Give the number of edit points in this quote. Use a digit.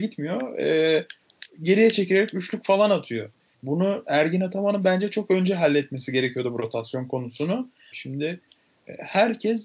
2